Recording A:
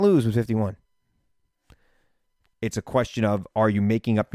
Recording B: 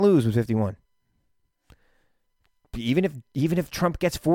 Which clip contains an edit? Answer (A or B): A